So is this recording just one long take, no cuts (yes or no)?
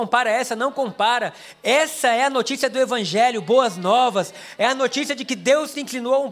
yes